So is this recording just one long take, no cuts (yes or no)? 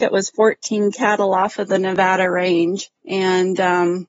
no